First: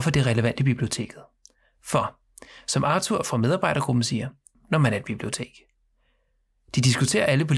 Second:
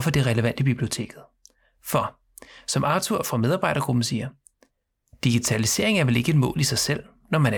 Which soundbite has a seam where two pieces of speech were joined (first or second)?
first